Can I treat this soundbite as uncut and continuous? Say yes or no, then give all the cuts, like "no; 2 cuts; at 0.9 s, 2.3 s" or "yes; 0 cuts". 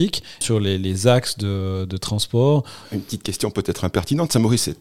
no; 1 cut; at 2.8 s